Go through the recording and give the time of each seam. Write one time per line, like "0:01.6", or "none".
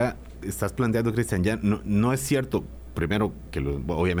none